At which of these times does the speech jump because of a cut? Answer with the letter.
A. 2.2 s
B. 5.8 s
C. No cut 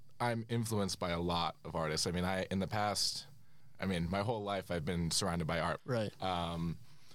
B